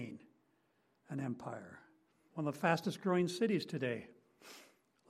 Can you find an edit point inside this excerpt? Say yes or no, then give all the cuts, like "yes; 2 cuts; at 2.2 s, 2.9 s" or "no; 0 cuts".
yes; 1 cut; at 2.3 s